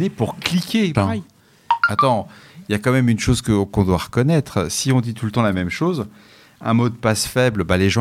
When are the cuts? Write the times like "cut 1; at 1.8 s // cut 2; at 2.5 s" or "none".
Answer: cut 1; at 0.9 s